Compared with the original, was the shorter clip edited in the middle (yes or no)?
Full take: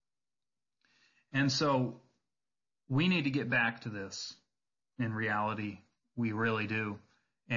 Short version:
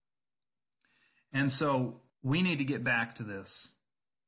yes